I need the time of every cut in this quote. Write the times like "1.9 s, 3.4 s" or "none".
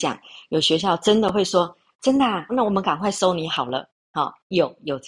2.5 s